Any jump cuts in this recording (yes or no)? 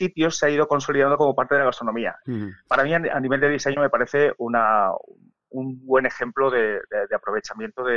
no